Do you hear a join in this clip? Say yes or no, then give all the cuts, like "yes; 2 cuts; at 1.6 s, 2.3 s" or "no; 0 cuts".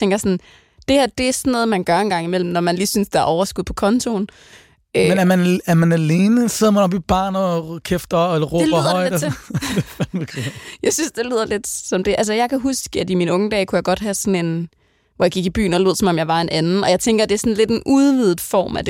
no; 0 cuts